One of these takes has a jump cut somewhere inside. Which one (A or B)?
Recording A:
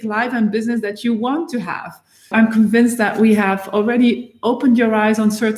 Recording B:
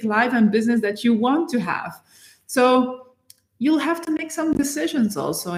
A